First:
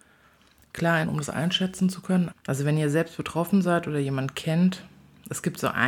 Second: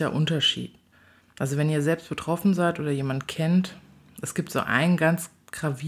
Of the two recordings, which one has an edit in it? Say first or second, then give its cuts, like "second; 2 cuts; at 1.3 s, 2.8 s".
first; 2 cuts; at 1.0 s, 2.3 s